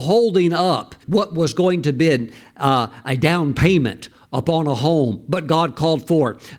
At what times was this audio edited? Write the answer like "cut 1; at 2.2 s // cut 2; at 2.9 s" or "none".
cut 1; at 1.0 s